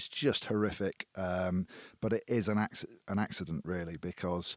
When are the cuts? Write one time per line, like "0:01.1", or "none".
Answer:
none